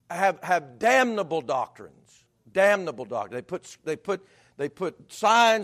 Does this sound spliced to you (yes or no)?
no